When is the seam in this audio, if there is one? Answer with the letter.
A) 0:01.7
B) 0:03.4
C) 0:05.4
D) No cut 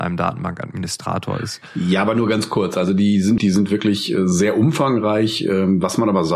B